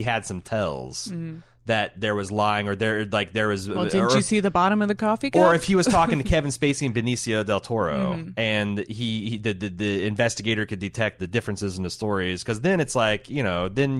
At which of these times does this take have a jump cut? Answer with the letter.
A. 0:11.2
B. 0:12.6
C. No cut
A